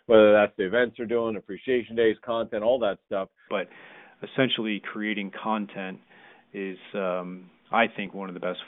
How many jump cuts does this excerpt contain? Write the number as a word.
one